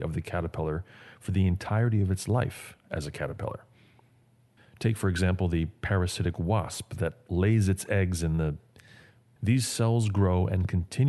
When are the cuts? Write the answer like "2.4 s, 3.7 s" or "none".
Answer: 4.6 s, 9.4 s